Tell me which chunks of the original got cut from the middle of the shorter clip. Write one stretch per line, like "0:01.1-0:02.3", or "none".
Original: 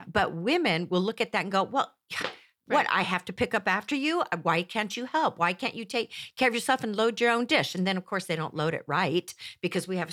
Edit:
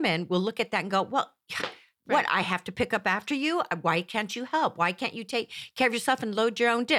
none